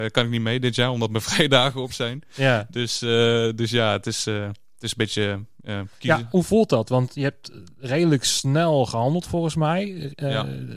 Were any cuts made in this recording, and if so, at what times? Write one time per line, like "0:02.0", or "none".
0:06.3